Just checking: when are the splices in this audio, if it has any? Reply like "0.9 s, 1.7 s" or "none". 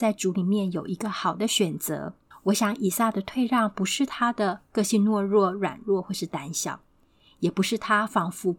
2.3 s